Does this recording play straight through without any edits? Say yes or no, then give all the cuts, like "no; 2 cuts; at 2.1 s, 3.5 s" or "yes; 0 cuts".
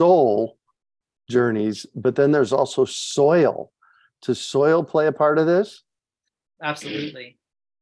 yes; 0 cuts